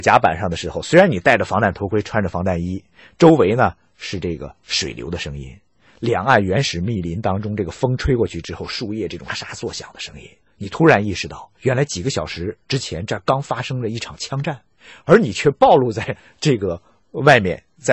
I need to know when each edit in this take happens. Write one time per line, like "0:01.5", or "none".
0:09.3
0:15.0